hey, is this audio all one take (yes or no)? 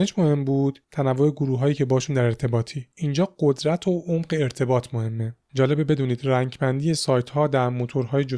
no